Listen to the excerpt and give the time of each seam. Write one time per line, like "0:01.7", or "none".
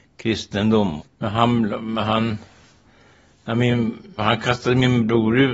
0:01.0
0:04.2